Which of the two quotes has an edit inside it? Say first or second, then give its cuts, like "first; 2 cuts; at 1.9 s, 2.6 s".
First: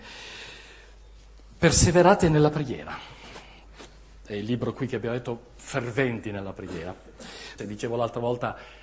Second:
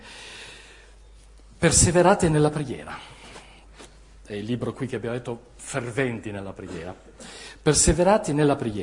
first; 1 cut; at 7.6 s